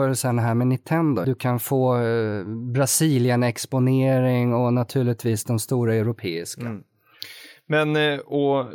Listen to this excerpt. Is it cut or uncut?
cut